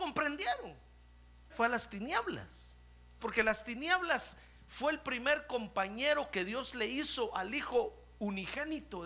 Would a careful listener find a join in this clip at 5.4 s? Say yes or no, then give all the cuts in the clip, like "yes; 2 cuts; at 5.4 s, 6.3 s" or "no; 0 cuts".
no; 2 cuts; at 1.5 s, 3.2 s